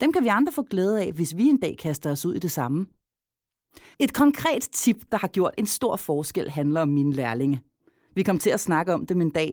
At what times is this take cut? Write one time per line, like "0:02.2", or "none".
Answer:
none